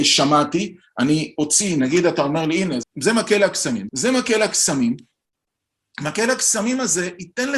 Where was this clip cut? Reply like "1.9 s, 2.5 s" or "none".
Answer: 2.8 s, 3.9 s